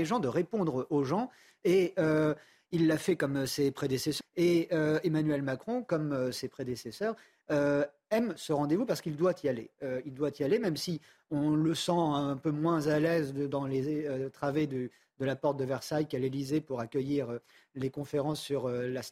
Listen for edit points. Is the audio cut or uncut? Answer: cut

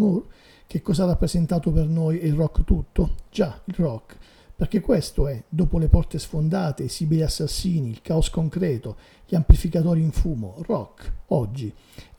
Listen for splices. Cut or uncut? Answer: uncut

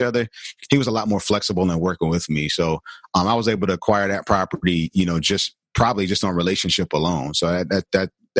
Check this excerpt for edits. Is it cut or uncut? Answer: uncut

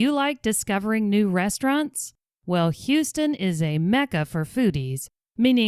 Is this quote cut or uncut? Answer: uncut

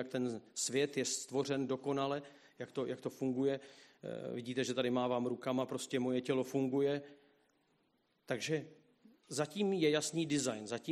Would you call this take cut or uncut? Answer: uncut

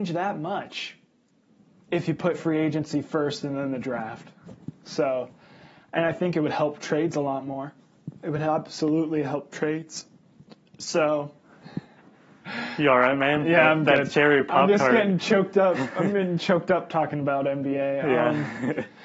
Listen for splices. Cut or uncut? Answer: uncut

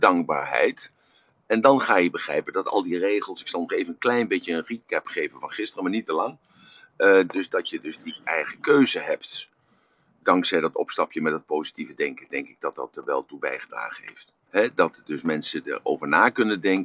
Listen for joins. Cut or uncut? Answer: cut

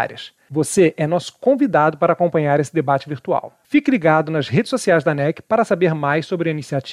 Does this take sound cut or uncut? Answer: uncut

